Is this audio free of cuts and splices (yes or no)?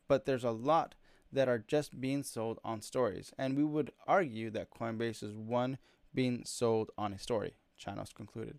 yes